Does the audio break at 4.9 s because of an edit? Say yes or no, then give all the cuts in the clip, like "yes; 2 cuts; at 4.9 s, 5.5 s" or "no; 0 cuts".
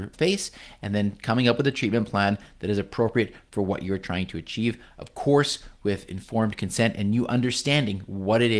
no; 0 cuts